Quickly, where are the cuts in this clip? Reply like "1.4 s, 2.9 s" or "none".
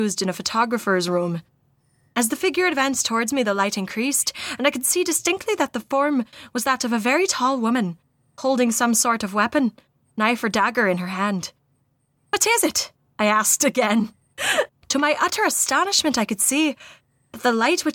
14.7 s